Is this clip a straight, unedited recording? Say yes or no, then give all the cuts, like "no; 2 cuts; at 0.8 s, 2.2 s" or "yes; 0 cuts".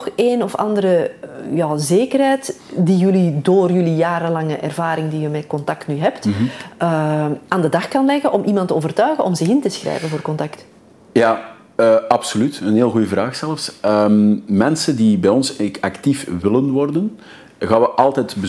yes; 0 cuts